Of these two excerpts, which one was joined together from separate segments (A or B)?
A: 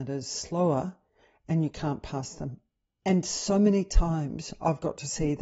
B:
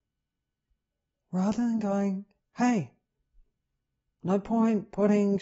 A